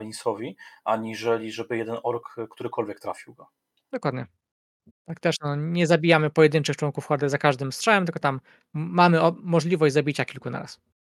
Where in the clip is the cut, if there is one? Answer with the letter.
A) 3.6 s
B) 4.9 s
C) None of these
B